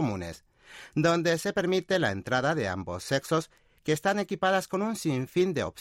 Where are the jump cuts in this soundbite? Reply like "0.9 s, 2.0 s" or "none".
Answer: none